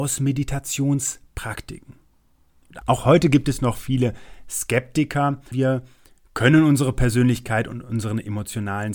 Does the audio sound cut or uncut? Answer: cut